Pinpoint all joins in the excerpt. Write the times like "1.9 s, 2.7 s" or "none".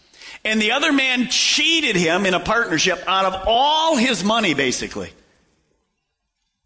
none

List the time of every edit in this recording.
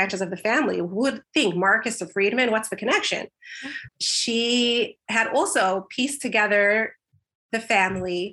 3.9 s

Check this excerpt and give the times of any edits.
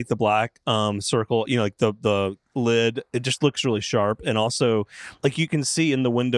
none

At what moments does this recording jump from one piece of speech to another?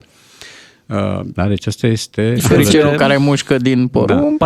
1.3 s, 2.4 s

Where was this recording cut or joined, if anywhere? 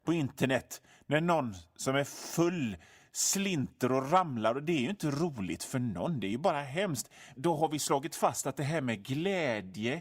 7.3 s

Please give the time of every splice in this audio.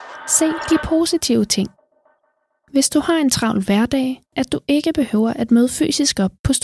4.3 s

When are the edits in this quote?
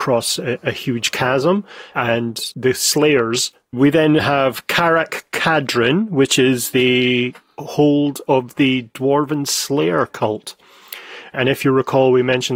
3.7 s

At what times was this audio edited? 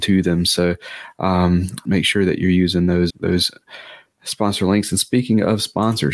1.9 s, 3.1 s

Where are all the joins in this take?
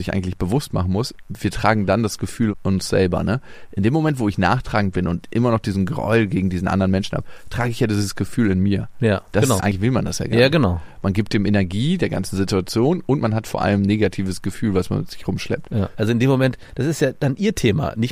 9.6 s, 15.9 s

